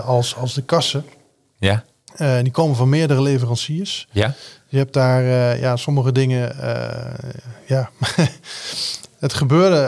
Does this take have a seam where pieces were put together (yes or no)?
no